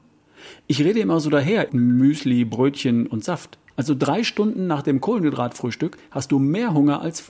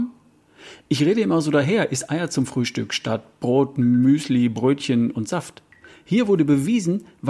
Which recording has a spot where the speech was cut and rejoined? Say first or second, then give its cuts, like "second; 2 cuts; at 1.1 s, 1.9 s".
first; 2 cuts; at 1.7 s, 3.7 s